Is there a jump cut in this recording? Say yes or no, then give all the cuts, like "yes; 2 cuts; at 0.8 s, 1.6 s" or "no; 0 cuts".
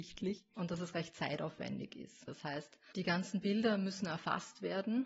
yes; 1 cut; at 2.3 s